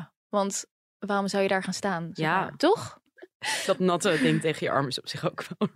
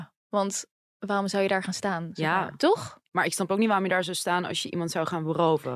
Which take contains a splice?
first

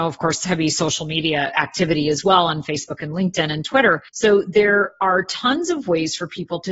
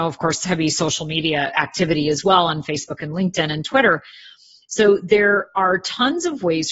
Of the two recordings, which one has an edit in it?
first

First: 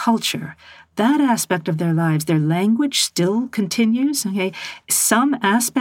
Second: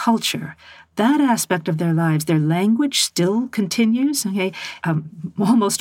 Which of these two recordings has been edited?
second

